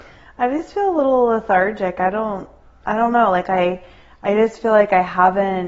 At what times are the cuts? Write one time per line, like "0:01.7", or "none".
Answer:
none